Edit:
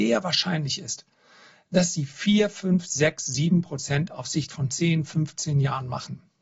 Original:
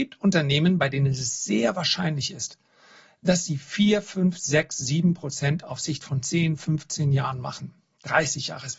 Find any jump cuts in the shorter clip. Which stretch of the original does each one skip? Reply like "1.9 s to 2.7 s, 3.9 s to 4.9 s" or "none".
none